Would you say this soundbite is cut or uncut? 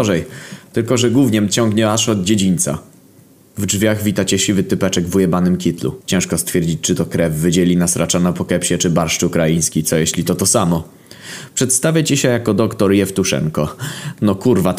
cut